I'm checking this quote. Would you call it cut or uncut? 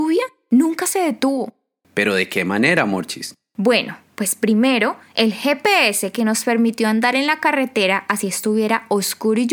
cut